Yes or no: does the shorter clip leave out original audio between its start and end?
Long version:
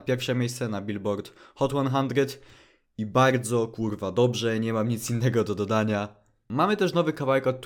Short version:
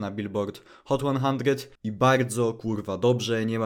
yes